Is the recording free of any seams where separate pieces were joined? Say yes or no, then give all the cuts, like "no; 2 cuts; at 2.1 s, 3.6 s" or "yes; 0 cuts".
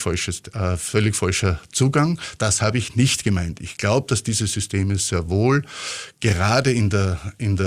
yes; 0 cuts